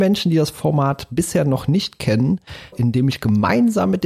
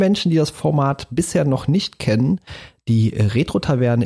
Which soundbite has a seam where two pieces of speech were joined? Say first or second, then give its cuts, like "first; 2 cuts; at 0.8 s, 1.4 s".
first; 1 cut; at 2.7 s